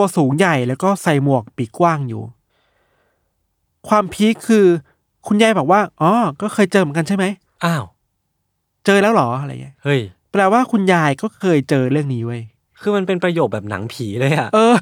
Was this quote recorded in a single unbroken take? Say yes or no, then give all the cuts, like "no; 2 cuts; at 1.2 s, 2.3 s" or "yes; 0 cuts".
yes; 0 cuts